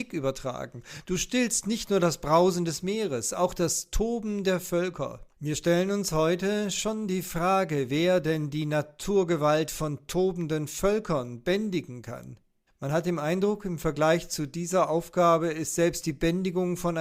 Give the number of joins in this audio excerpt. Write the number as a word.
two